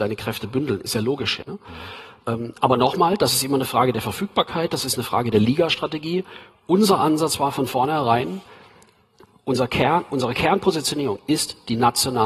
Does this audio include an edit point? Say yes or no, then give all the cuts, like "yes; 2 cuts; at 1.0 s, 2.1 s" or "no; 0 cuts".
yes; 1 cut; at 1.4 s